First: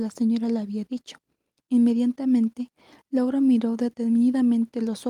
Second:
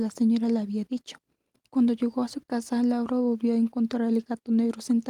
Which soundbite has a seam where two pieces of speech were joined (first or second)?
second